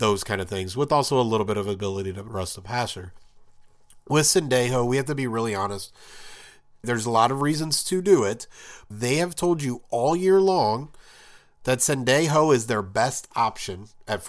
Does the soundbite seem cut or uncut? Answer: cut